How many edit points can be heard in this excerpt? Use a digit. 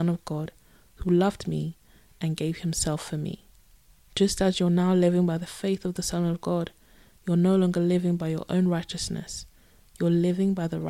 0